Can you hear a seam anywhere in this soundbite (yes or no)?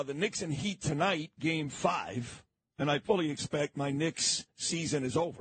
no